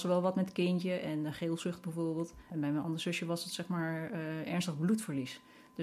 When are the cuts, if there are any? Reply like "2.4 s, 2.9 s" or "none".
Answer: 2.4 s

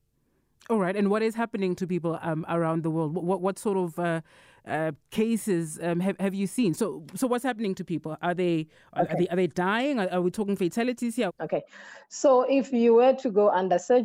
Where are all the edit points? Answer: 11.3 s

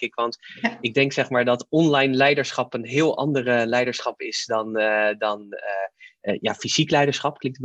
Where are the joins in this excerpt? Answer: none

